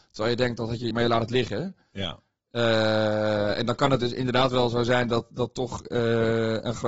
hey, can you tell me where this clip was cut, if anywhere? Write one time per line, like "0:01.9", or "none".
0:00.9